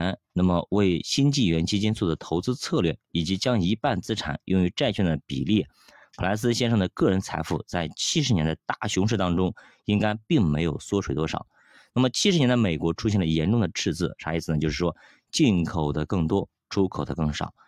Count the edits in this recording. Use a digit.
0